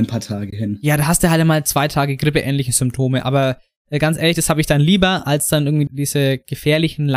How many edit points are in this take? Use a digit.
1